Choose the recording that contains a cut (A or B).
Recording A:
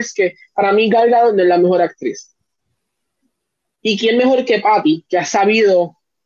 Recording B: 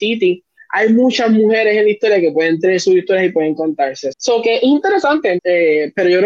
B